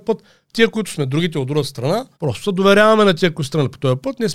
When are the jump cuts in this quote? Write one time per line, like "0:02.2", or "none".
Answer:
0:02.1